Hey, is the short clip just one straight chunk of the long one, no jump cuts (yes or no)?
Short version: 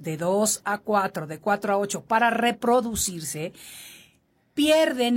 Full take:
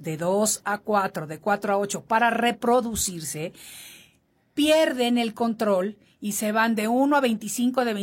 yes